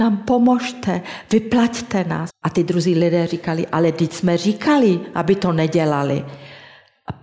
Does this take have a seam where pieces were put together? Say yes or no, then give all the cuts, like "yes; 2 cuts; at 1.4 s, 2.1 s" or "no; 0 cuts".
yes; 1 cut; at 2.3 s